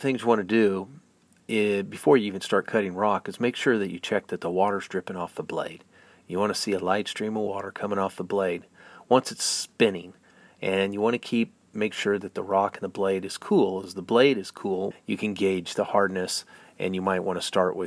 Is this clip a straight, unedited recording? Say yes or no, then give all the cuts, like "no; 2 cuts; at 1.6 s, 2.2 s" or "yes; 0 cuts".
no; 2 cuts; at 13.8 s, 14.9 s